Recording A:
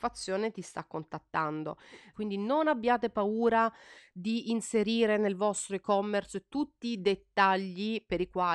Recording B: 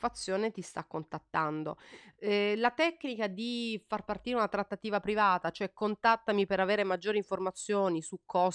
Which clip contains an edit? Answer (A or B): A